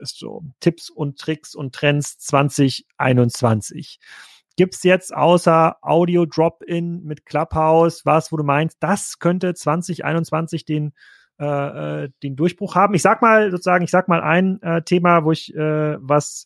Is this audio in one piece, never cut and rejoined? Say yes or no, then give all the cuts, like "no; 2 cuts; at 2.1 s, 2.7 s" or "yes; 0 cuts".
yes; 0 cuts